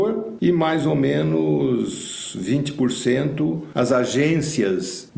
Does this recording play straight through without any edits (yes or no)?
yes